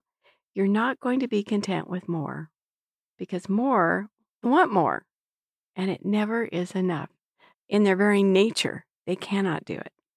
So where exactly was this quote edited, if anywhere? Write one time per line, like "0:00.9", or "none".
0:04.4
0:07.5